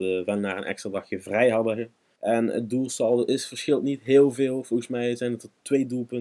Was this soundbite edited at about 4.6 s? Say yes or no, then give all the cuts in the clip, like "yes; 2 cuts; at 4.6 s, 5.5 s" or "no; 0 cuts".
no; 1 cut; at 2.2 s